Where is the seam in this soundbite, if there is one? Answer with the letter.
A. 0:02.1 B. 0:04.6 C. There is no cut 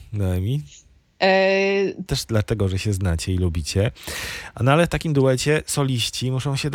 A